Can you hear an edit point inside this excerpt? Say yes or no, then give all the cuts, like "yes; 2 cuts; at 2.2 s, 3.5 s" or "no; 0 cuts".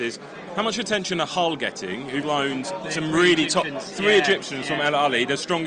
yes; 1 cut; at 2.2 s